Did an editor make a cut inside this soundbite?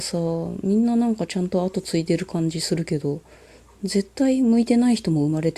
no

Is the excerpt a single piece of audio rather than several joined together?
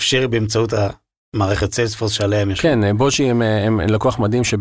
yes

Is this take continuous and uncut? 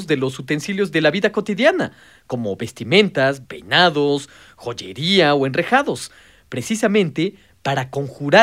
no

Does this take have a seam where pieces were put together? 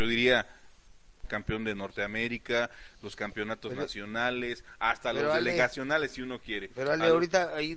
yes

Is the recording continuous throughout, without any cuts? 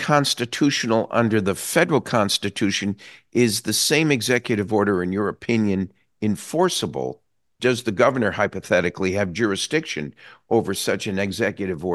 no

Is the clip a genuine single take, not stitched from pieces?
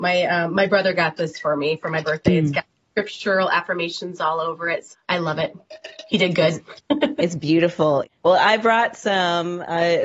no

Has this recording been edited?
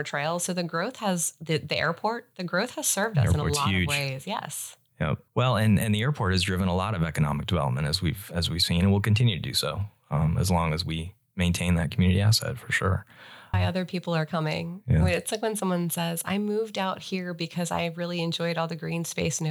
yes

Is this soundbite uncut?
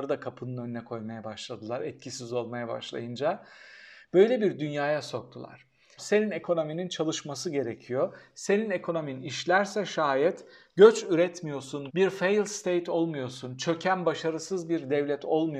no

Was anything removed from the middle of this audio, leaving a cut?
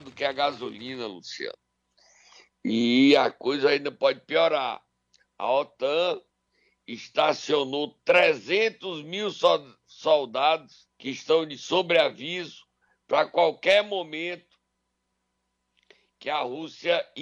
yes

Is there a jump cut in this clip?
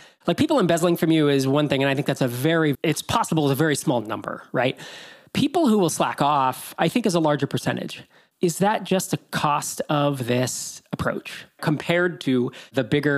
yes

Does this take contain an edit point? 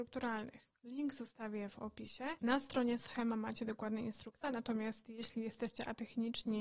yes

